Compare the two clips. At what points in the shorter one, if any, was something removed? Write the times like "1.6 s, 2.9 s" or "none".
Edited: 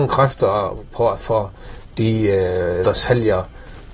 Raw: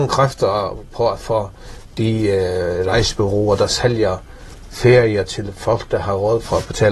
2.8 s